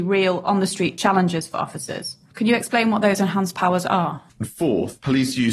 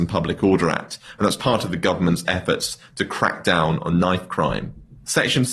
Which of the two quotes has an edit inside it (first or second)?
first